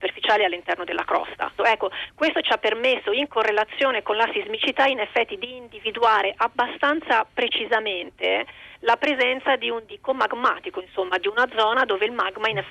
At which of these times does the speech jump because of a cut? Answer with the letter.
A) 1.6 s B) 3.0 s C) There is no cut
A